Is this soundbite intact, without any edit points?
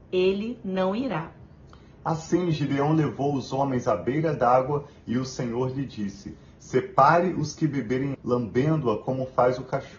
no; 1 cut; at 8.1 s

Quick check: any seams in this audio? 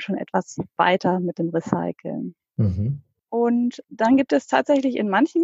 yes; 1 cut; at 2.4 s

